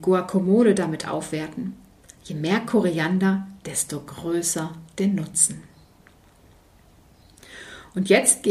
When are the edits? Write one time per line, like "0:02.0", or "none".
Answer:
none